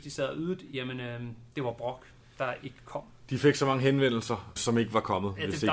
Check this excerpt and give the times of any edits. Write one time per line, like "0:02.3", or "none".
0:04.6